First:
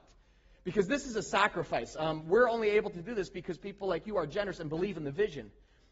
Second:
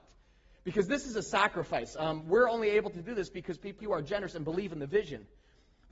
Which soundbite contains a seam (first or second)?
second